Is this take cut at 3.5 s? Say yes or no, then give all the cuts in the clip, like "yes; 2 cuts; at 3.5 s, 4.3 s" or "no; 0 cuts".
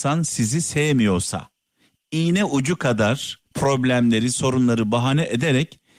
yes; 1 cut; at 3.5 s